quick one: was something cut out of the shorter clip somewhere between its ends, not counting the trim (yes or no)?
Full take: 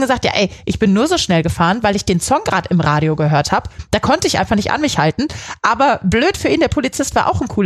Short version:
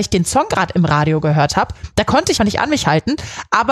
yes